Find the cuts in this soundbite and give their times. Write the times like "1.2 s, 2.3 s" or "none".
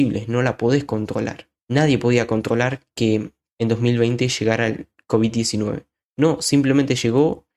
none